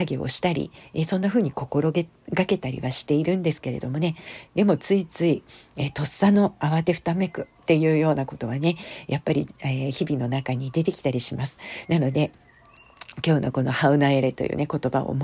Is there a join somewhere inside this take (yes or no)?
no